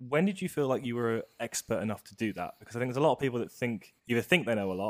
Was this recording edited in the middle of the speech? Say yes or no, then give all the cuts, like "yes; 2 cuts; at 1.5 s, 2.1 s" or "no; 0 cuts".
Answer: yes; 1 cut; at 4.0 s